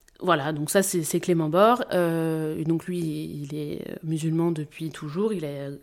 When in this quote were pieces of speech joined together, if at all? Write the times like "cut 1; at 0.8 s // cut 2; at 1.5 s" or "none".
cut 1; at 1.9 s